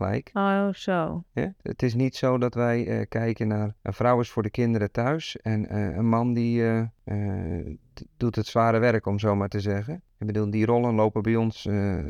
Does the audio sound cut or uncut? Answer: uncut